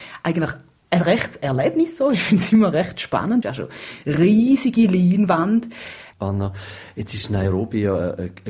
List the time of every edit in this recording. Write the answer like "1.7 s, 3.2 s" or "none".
3.4 s, 6.1 s

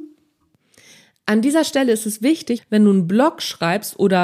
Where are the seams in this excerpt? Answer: 2.6 s

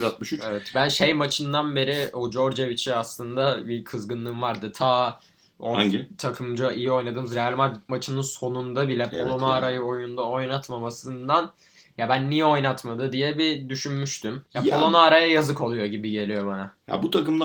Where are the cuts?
14.5 s

